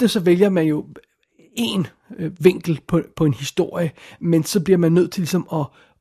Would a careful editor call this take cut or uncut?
uncut